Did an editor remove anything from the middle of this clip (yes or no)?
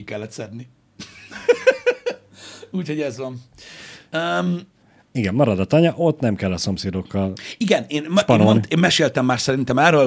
no